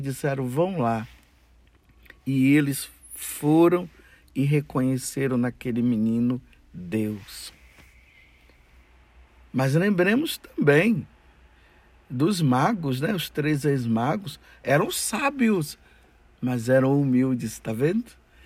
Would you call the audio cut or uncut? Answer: uncut